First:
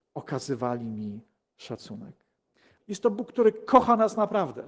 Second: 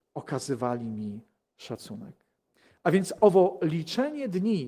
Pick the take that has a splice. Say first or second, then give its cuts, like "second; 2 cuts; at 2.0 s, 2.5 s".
first; 1 cut; at 2.8 s